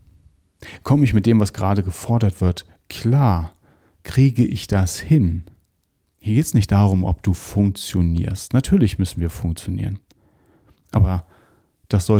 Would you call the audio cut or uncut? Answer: cut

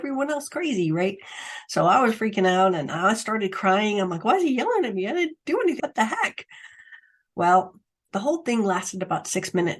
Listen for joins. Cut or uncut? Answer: cut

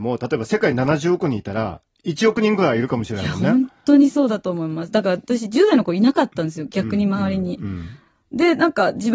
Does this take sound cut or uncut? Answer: uncut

